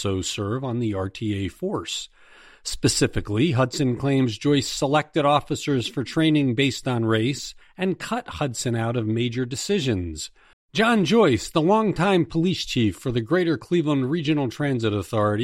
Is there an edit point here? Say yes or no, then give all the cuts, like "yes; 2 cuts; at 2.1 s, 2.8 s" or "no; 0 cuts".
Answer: yes; 2 cuts; at 7.6 s, 10.5 s